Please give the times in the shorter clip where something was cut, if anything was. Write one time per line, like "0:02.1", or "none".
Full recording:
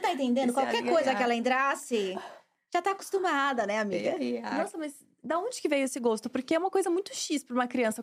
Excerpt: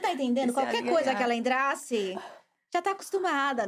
none